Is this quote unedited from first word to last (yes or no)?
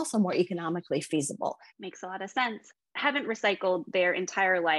no